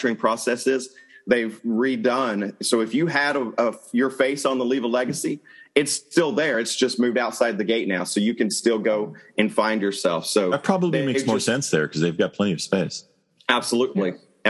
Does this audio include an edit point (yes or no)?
no